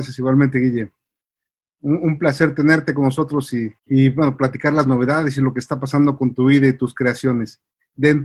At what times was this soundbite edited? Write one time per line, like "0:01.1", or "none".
0:03.8